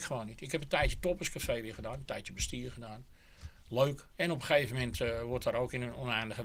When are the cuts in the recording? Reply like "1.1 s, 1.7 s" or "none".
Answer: 4.1 s